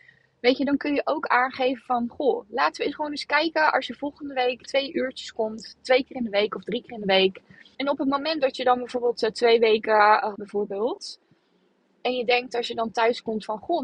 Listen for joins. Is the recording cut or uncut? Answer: cut